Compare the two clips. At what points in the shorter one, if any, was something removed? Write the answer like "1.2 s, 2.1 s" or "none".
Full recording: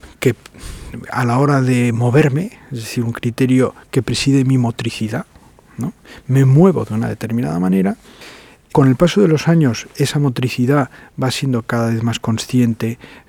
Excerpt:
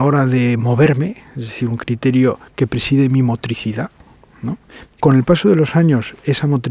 4.9 s